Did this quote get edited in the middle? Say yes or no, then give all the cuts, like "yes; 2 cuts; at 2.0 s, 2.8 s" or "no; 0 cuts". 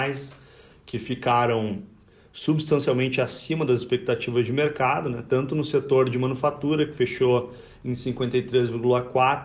no; 0 cuts